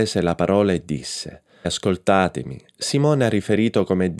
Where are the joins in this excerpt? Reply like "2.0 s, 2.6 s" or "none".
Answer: 1.6 s